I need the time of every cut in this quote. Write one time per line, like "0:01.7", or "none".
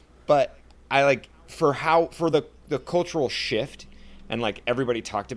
none

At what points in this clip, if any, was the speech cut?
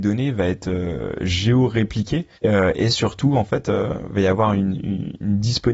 0:02.4

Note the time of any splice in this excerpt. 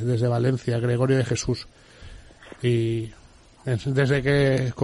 none

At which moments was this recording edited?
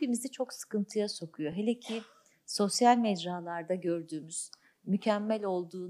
none

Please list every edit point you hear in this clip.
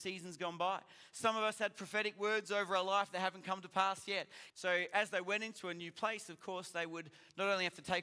0:04.5

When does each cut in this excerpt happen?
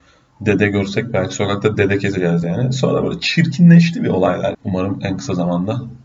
0:04.5

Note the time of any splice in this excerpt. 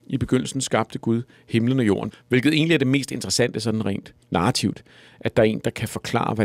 0:02.1
0:04.2

